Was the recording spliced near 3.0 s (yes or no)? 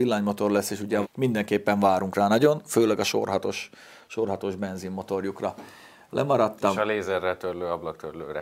no